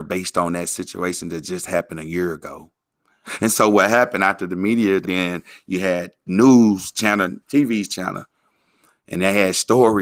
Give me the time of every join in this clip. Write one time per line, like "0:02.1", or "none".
0:05.0
0:07.4